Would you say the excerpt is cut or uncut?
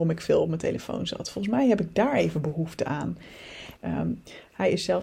cut